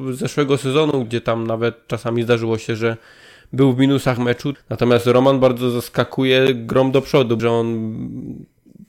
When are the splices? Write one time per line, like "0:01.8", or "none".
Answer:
0:01.0
0:04.5
0:07.4